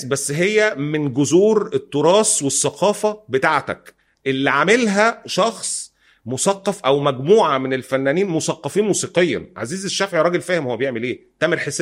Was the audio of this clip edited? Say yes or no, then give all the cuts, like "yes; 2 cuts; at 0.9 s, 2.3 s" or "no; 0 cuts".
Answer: no; 0 cuts